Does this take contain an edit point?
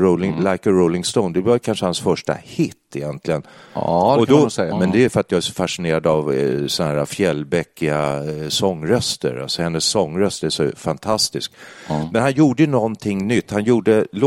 yes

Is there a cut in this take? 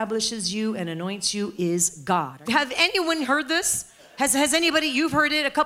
yes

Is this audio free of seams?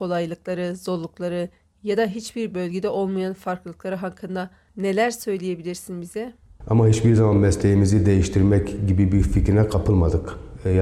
no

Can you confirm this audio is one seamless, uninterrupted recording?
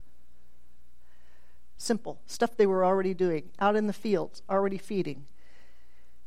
no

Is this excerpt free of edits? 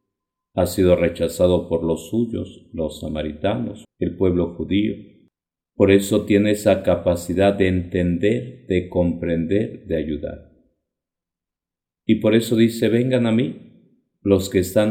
no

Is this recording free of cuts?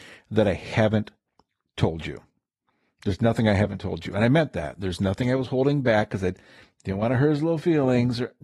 yes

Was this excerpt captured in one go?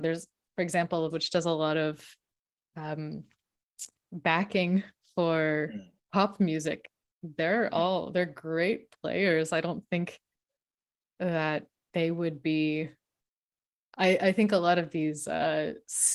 no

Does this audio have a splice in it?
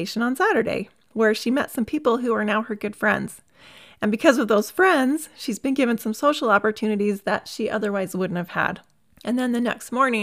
yes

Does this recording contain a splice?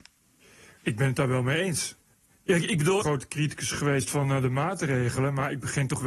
yes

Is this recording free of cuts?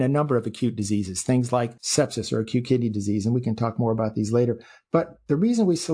no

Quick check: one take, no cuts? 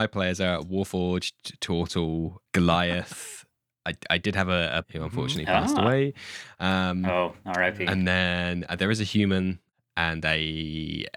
no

